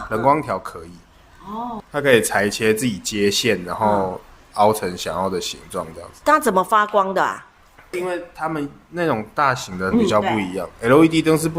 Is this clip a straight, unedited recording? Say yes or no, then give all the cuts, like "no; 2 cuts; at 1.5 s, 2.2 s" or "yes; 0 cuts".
no; 3 cuts; at 1.8 s, 7.9 s, 9.9 s